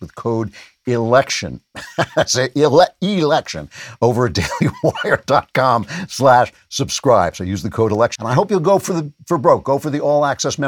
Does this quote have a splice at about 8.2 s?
yes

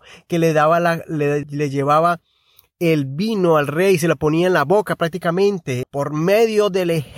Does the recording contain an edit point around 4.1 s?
no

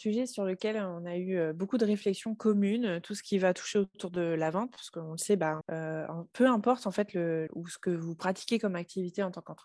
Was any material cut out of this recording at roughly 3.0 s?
no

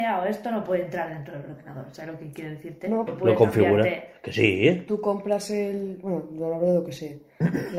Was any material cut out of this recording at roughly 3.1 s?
yes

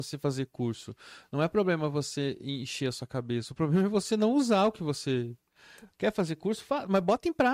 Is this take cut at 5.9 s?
yes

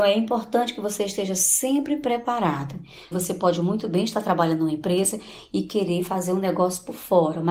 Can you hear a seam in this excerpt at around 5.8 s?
no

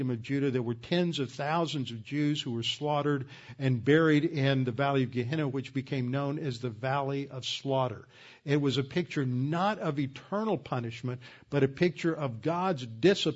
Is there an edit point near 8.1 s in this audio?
no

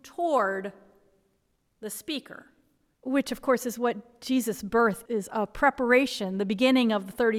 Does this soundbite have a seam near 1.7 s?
no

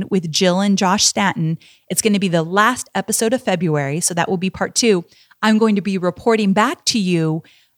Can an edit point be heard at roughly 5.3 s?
no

